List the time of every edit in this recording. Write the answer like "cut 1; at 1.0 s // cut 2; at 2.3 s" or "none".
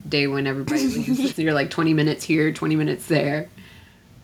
cut 1; at 1.3 s